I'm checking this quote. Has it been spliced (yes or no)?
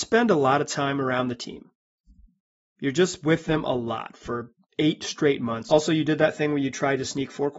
yes